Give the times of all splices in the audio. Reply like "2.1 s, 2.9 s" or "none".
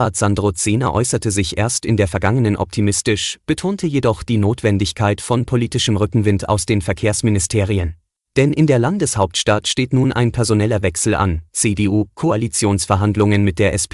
8.2 s, 11.5 s